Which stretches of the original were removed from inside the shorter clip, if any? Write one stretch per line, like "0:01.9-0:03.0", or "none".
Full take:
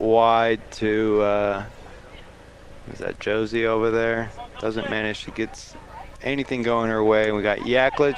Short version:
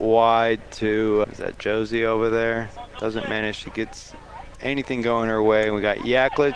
0:01.2-0:02.9